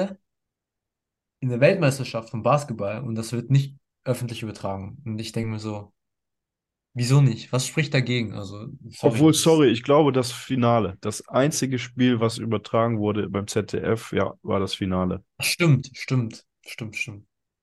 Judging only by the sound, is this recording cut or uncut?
uncut